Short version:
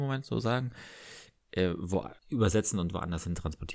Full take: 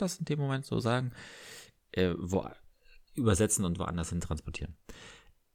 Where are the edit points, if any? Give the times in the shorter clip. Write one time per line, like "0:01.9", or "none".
0:02.2